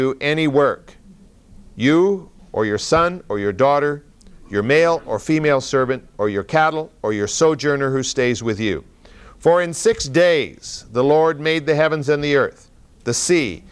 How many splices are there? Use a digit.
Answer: 0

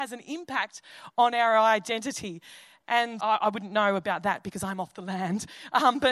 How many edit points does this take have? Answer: 1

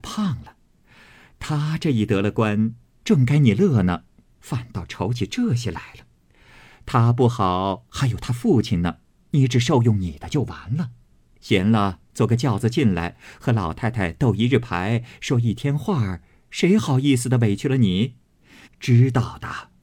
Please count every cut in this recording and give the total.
1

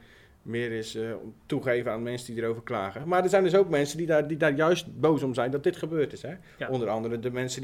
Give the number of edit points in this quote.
0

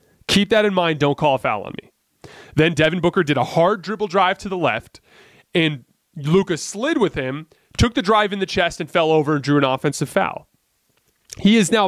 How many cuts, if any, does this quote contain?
0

